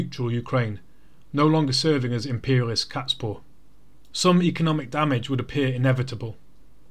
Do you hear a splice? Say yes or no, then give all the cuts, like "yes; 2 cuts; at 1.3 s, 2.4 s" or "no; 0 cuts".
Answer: no; 0 cuts